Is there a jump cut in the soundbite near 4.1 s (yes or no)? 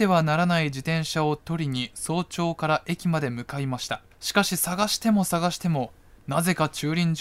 yes